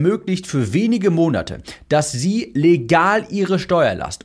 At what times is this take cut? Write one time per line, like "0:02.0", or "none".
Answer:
none